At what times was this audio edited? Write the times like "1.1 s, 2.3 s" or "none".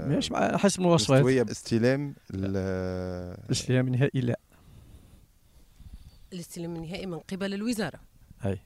1.5 s